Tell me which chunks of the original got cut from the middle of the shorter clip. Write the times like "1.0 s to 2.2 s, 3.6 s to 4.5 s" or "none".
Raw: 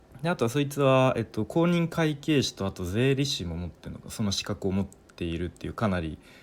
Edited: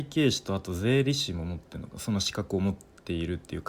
none